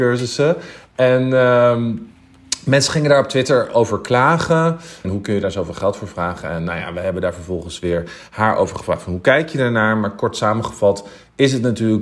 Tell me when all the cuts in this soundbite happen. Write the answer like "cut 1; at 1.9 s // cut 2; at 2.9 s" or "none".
cut 1; at 5.0 s

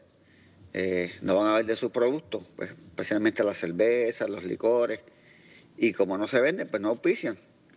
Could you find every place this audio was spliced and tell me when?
none

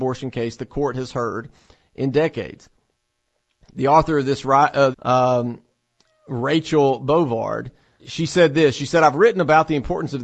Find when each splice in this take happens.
cut 1; at 4.9 s // cut 2; at 8.0 s

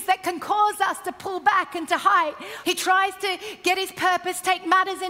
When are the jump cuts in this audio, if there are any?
cut 1; at 2.6 s

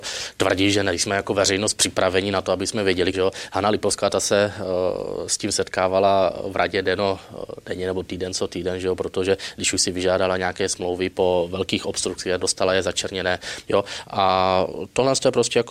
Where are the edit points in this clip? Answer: cut 1; at 3.1 s // cut 2; at 12.4 s // cut 3; at 13.6 s

